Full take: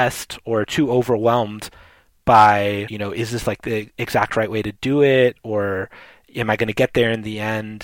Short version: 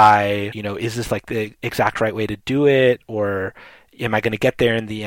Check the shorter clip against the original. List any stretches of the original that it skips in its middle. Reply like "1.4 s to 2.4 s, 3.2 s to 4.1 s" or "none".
none